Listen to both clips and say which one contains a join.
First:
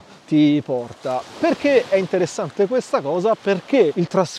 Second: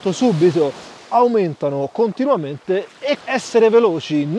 second; 1 cut; at 3.2 s

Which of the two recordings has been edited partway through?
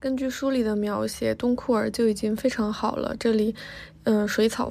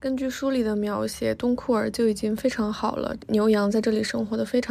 second; 1 cut; at 3.2 s

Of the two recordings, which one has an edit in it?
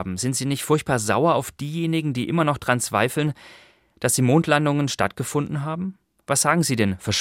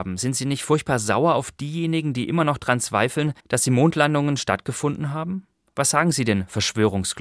second; 1 cut; at 3.4 s

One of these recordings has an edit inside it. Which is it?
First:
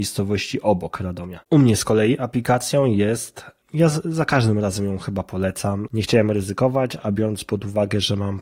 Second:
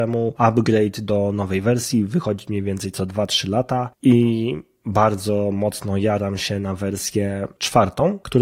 first; 2 cuts; at 1.4 s, 5.9 s

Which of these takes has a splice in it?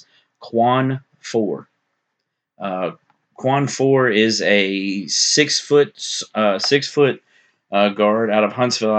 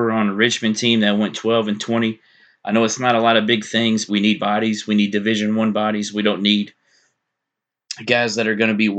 second; 1 cut; at 4.1 s

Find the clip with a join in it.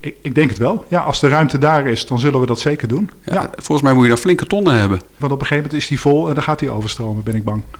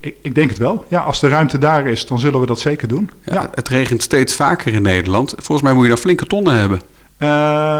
first; 2 cuts; at 3.6 s, 5.2 s

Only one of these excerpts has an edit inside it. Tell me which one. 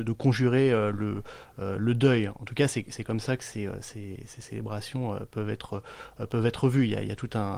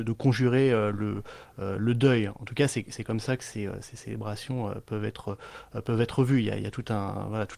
second; 1 cut; at 3.8 s

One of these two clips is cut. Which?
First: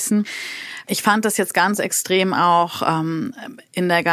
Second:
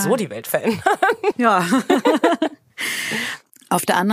second; 1 cut; at 1.3 s

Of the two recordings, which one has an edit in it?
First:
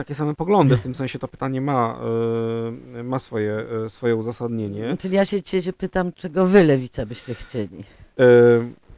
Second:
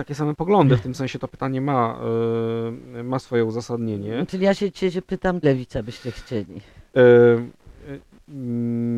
second; 2 cuts; at 3.2 s, 5.4 s

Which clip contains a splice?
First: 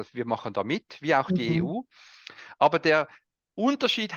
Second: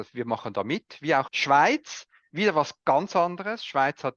second; 1 cut; at 1.3 s

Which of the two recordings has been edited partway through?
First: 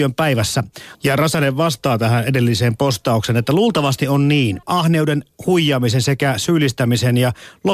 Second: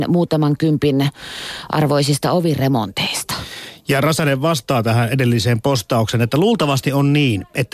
first; 2 cuts; at 0.9 s, 4.6 s

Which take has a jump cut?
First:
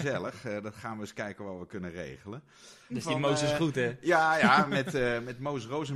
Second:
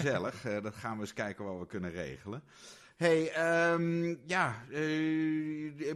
first; 1 cut; at 2.9 s

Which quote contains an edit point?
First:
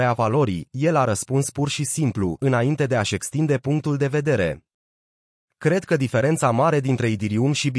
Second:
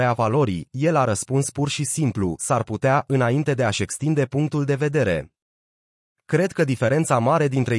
first; 1 cut; at 2.4 s

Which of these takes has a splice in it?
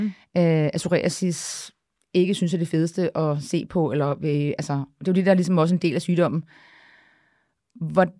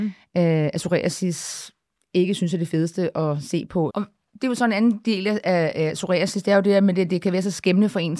second; 1 cut; at 3.9 s

